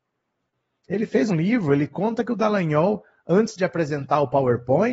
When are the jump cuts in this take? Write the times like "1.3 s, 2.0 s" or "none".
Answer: 1.3 s

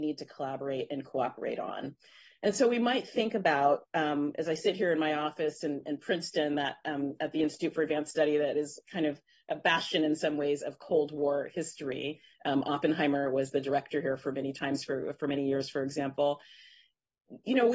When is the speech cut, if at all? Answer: none

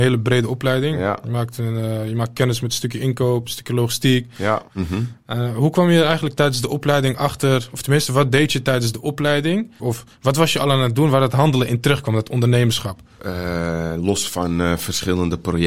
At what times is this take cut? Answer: 4.7 s, 9.8 s, 13.2 s

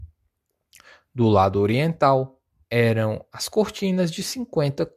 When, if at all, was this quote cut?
2.6 s

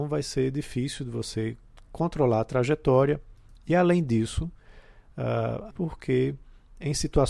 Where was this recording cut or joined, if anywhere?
5.7 s

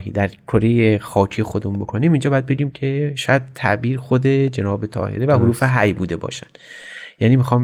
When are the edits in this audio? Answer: none

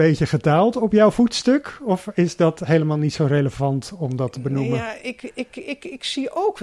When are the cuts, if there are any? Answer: none

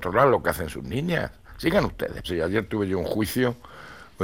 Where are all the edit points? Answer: 2.2 s

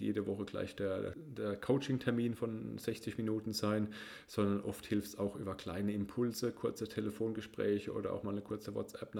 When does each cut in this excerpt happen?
1.1 s

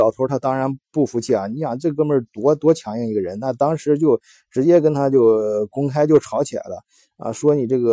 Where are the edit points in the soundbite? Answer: none

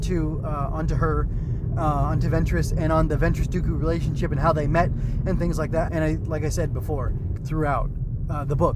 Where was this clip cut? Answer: 5.9 s, 7.4 s

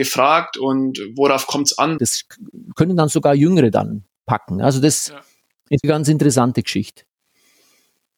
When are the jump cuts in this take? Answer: 2.0 s, 5.8 s

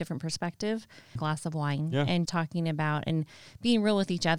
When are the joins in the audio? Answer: 1.2 s, 2.3 s

